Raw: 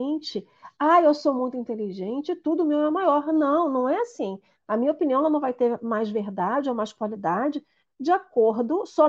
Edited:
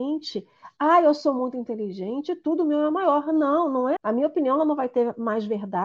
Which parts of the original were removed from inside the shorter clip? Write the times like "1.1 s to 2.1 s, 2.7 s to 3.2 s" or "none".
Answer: 4.0 s to 4.6 s